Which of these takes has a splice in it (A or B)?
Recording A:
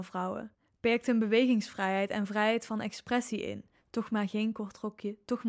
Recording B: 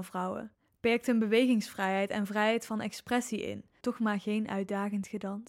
B